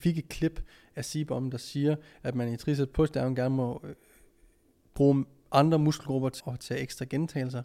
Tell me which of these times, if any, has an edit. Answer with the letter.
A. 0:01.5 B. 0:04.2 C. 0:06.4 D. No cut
C